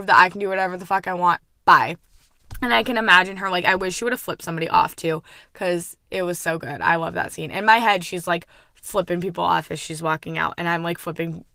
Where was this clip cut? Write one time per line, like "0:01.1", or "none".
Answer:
none

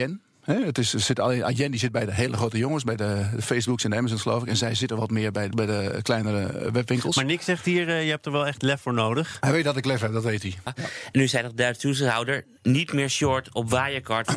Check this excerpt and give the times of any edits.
0:05.5
0:10.7

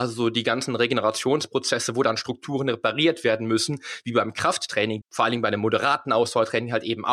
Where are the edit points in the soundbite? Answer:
0:05.0

